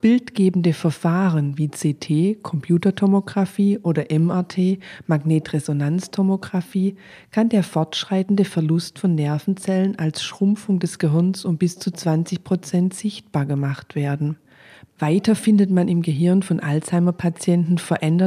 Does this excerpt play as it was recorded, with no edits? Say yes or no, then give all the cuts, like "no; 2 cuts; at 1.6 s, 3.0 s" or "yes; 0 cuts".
yes; 0 cuts